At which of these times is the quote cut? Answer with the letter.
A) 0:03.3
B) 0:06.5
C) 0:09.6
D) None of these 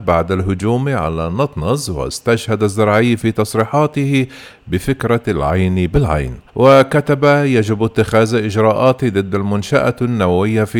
B